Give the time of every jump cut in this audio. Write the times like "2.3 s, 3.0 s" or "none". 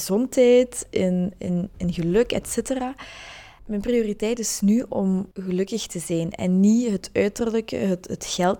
3.6 s, 5.3 s